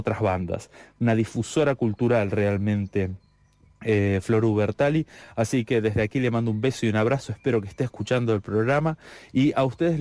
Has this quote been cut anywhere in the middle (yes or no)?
no